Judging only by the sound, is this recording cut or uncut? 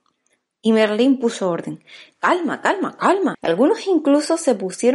cut